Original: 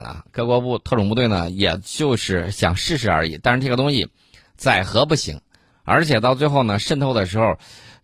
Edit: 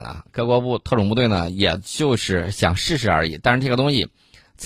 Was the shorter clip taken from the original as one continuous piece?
yes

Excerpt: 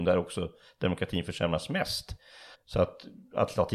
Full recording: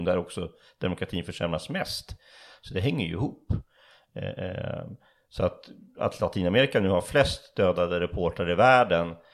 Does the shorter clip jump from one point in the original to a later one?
yes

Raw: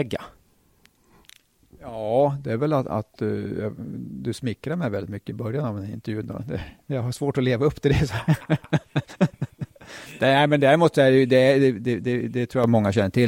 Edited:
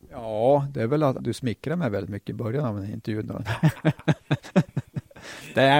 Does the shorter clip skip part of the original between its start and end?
yes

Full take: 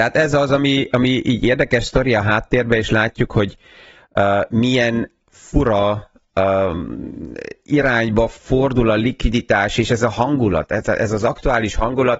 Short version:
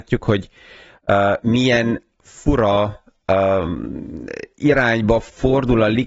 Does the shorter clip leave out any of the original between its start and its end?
no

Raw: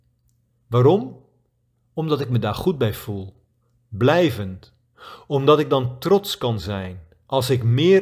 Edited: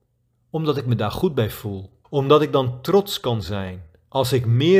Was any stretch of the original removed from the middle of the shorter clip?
yes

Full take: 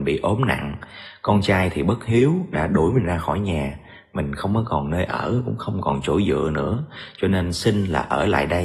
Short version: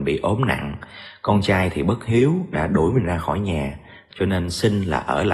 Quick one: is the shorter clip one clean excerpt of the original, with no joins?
no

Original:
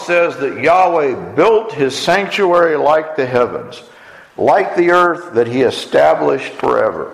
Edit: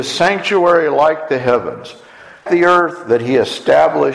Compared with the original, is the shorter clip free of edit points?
no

